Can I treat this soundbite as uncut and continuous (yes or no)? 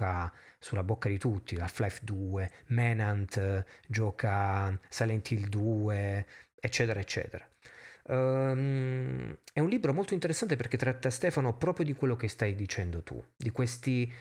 yes